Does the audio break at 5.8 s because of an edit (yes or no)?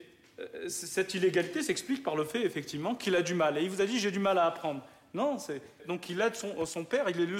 yes